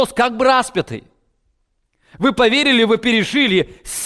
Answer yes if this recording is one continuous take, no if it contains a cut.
yes